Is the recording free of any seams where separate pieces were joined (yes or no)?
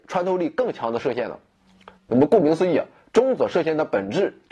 no